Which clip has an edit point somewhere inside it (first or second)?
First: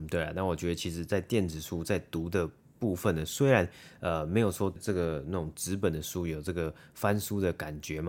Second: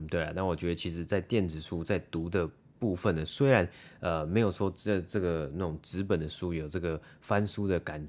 first